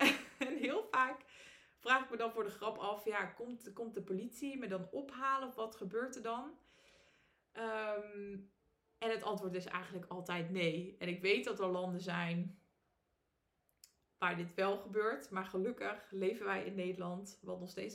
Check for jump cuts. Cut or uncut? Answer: uncut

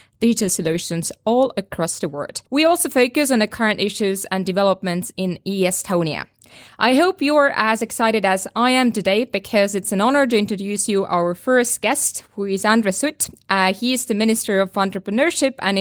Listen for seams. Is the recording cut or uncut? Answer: cut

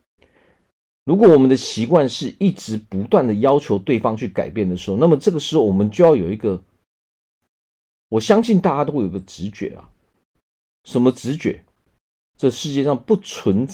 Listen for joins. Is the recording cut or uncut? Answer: cut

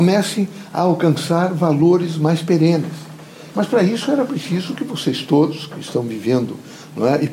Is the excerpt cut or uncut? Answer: cut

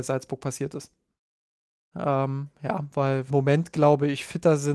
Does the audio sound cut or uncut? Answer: cut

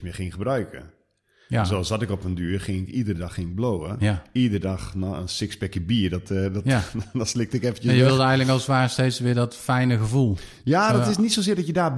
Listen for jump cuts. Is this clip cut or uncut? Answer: uncut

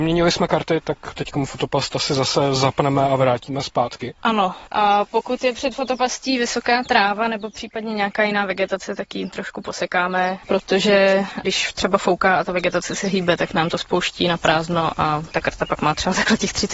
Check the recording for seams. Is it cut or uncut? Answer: cut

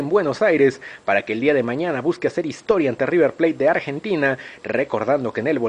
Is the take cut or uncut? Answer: uncut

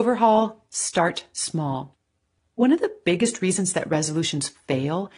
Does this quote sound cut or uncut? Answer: uncut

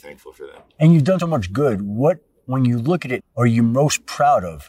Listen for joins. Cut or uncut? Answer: cut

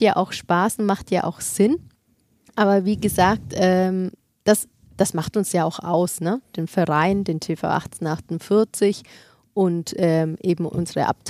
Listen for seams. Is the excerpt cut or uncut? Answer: uncut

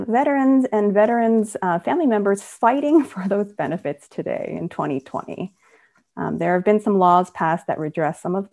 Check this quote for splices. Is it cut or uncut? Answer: uncut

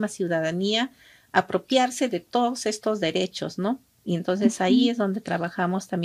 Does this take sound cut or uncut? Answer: uncut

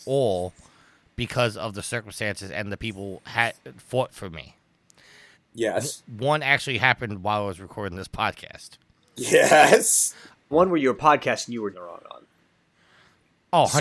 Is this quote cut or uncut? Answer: cut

